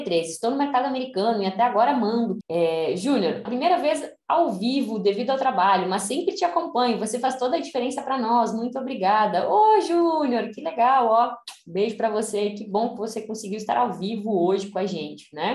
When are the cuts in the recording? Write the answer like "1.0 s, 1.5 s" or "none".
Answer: 2.4 s, 3.5 s